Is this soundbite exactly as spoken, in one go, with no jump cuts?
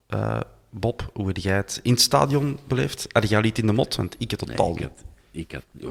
yes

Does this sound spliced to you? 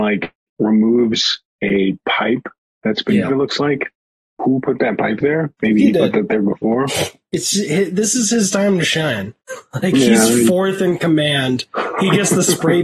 yes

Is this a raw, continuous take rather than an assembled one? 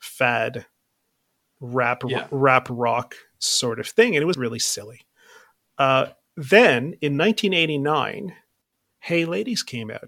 no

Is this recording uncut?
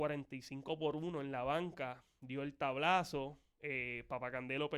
yes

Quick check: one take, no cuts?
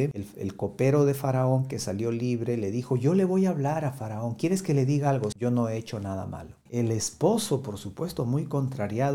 no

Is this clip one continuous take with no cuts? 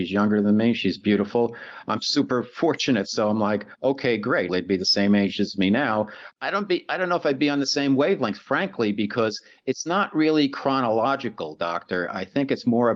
no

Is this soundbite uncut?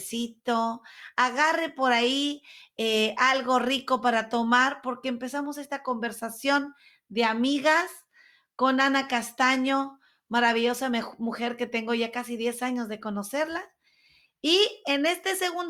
yes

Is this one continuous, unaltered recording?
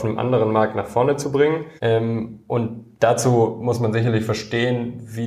no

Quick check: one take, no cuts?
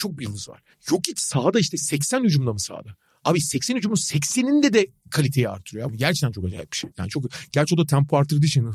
no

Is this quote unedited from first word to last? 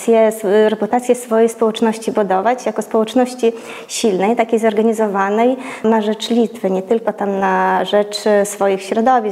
no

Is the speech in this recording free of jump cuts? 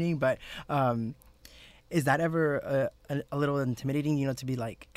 yes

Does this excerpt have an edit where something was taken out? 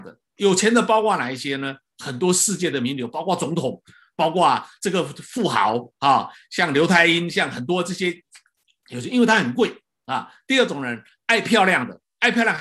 no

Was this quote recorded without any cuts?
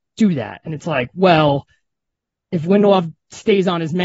yes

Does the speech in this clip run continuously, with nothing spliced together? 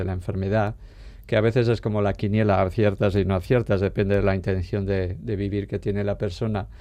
yes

